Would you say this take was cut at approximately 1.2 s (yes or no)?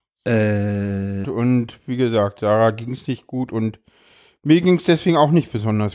yes